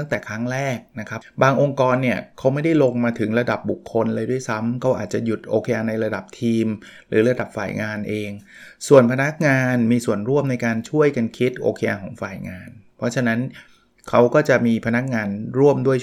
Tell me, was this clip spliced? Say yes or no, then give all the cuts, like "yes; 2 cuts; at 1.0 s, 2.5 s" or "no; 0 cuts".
yes; 1 cut; at 1.2 s